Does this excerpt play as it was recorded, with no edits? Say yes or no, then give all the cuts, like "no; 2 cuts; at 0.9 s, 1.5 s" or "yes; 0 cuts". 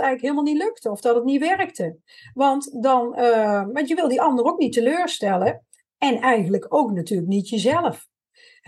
yes; 0 cuts